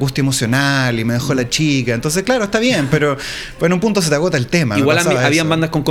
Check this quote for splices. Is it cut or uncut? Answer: uncut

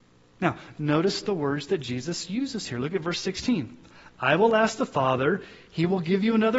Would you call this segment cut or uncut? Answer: uncut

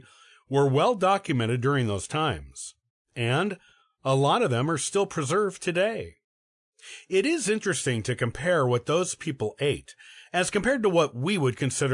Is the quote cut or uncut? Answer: uncut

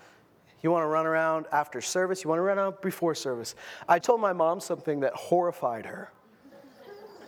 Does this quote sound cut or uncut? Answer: cut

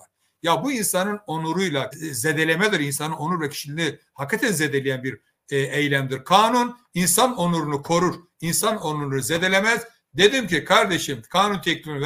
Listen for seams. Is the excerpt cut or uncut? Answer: cut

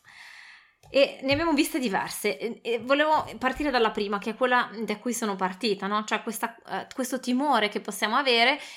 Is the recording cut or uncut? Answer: uncut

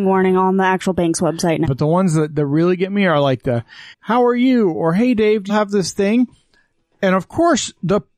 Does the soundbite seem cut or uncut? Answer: cut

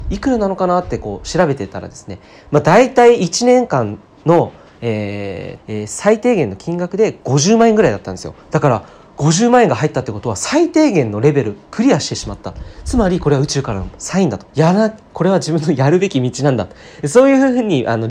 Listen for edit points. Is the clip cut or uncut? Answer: cut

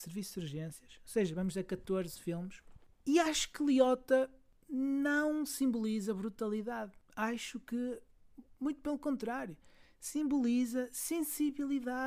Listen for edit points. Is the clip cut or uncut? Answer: uncut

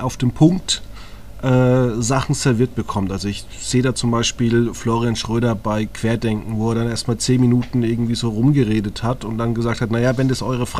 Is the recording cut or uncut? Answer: uncut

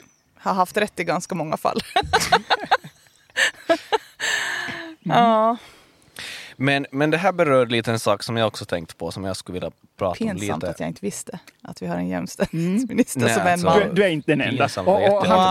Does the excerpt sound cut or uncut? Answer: uncut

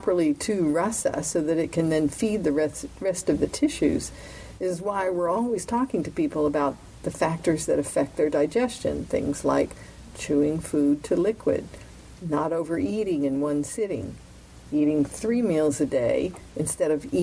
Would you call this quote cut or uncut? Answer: uncut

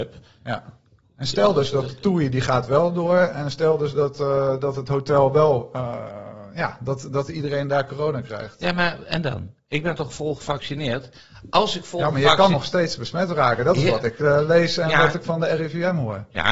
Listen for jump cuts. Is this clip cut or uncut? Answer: uncut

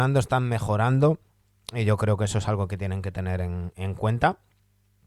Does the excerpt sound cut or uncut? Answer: uncut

